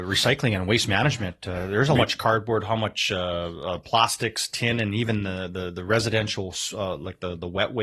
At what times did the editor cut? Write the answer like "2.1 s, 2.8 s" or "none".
2.0 s